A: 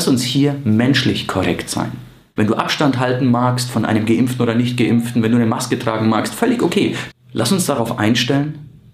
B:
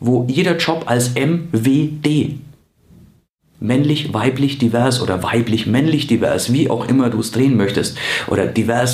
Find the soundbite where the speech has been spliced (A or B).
A